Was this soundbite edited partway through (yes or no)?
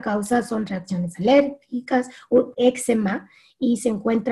yes